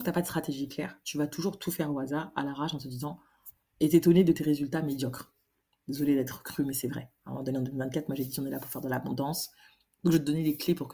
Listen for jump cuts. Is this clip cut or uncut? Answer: uncut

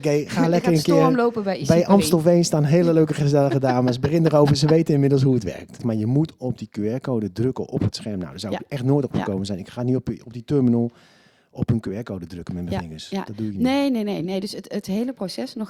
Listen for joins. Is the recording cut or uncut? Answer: cut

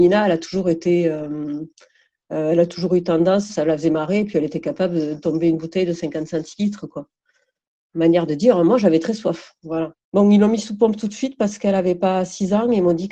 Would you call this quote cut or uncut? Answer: cut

